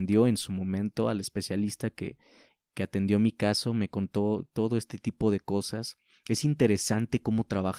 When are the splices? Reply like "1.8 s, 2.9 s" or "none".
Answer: none

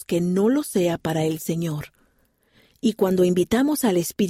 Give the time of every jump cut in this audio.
none

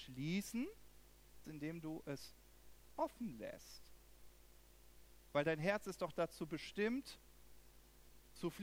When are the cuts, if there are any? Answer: 1.4 s

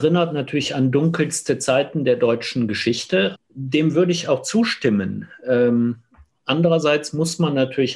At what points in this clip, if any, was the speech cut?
3.3 s

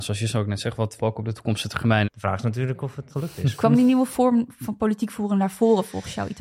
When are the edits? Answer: 1.0 s, 2.0 s, 3.1 s

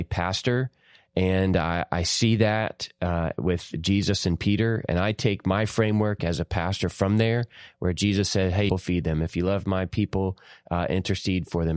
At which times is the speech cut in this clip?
8.7 s

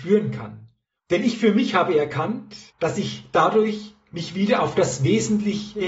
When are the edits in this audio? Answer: 1.0 s, 2.7 s

